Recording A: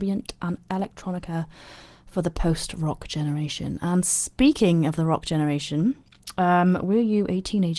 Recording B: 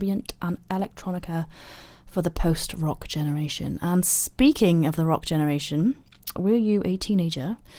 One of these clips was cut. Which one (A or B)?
B